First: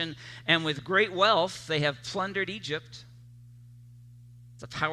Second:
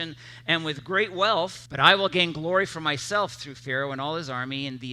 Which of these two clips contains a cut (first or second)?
second